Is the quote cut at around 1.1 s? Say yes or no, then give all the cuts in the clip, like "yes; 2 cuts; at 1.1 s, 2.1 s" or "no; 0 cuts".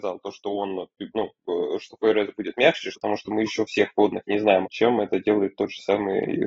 no; 2 cuts; at 2.9 s, 4.6 s